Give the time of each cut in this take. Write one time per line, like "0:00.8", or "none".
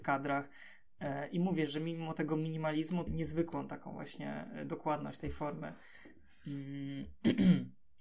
0:01.7
0:03.1